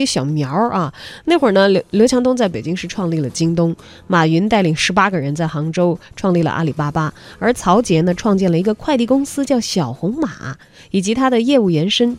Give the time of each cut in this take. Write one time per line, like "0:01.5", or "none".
none